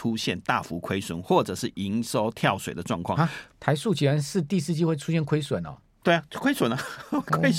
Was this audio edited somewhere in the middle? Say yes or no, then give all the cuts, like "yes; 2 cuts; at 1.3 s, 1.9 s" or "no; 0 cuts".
no; 0 cuts